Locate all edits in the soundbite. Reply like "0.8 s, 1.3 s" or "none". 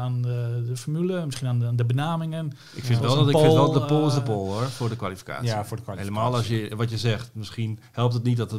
none